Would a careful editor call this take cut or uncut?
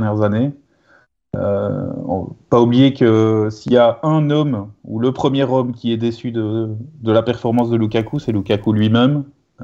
uncut